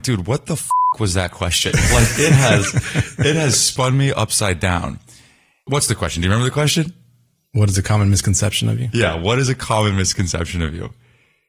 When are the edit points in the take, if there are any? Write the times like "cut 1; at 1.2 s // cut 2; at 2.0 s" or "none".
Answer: none